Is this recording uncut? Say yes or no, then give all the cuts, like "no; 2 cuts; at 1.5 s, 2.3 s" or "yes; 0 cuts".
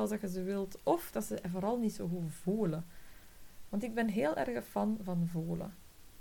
yes; 0 cuts